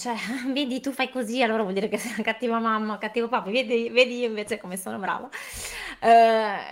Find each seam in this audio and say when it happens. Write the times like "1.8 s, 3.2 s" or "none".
none